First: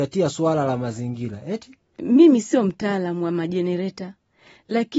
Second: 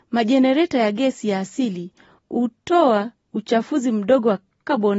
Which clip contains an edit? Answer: first; 1 cut; at 2.0 s

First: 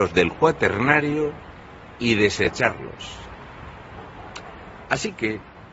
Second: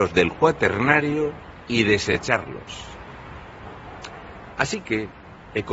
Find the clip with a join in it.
second; 1 cut; at 1.6 s

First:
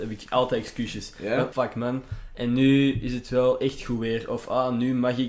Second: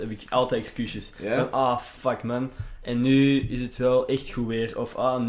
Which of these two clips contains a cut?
first; 1 cut; at 1.5 s

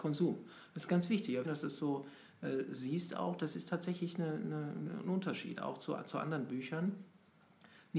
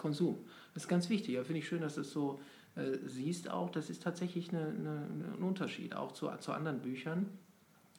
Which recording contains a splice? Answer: first; 1 cut; at 1.4 s

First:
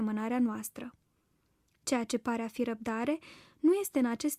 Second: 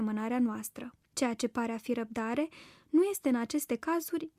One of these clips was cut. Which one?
second; 1 cut; at 1.0 s

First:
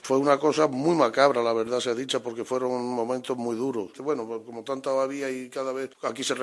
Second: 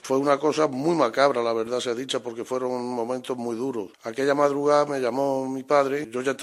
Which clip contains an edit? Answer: first; 1 cut; at 3.9 s

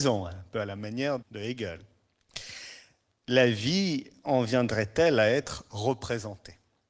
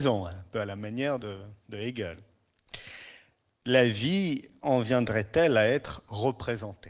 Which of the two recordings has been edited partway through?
first; 1 cut; at 1.2 s

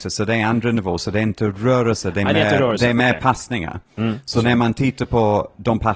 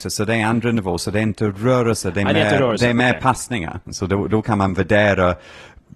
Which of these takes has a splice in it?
second; 1 cut; at 3.9 s

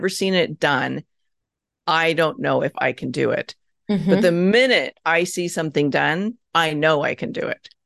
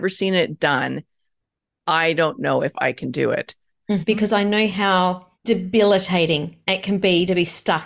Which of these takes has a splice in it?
second; 2 cuts; at 4.0 s, 5.3 s

